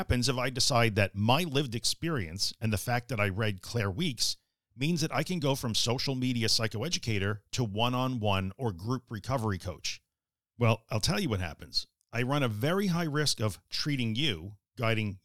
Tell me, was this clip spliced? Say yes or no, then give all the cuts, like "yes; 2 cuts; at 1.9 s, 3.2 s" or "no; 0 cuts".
no; 0 cuts